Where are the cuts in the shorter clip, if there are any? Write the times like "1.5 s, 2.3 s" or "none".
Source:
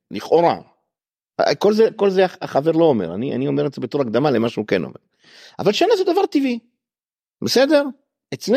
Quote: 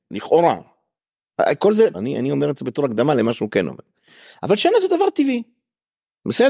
1.9 s